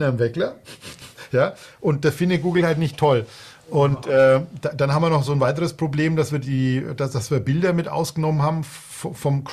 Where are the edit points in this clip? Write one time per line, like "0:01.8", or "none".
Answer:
none